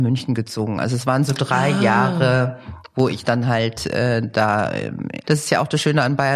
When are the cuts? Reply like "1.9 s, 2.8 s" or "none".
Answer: 5.2 s